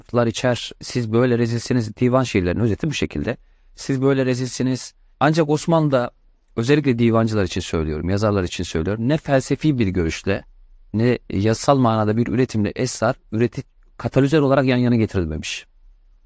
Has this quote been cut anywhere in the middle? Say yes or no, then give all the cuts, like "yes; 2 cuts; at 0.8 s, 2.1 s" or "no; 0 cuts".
yes; 2 cuts; at 5.1 s, 10.8 s